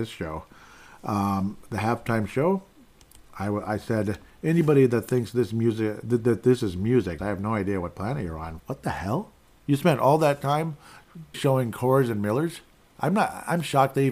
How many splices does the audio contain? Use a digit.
3